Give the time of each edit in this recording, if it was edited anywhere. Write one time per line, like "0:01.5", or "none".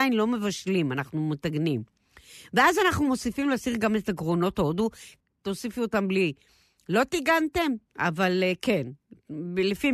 0:05.2
0:07.9

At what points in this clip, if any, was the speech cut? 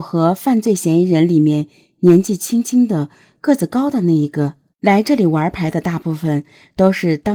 0:04.7

